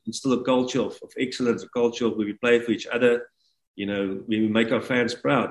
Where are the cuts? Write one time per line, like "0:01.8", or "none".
none